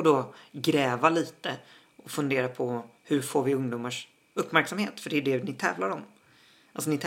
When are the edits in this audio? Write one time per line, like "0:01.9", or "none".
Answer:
none